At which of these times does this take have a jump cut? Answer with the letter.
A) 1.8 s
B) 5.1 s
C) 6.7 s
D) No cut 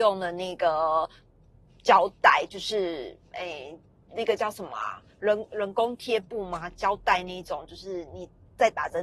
D